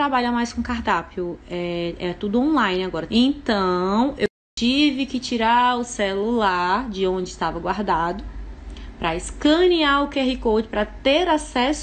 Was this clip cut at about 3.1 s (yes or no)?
yes